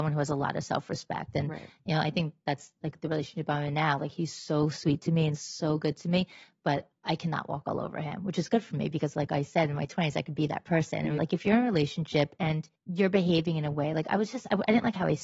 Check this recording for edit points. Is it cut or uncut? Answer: cut